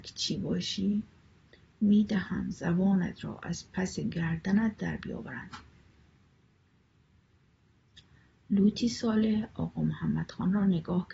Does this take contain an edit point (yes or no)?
no